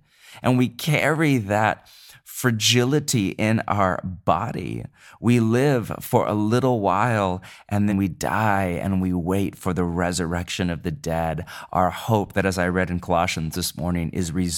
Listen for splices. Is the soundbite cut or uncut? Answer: cut